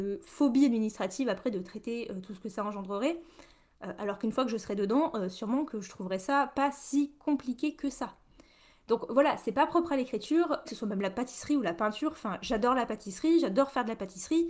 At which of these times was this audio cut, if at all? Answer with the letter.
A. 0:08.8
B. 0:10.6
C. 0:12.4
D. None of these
B